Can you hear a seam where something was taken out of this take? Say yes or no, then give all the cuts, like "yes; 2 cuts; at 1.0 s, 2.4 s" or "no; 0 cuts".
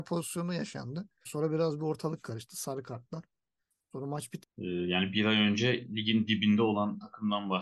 yes; 2 cuts; at 1.2 s, 4.4 s